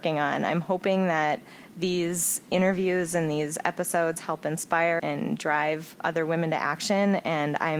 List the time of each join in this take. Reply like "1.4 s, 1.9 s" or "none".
5.0 s